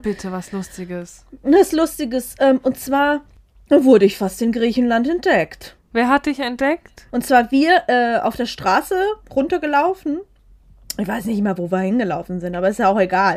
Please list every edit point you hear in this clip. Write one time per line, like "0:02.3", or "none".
0:05.9
0:07.1